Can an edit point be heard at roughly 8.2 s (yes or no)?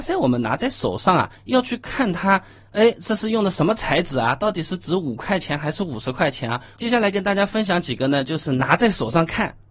no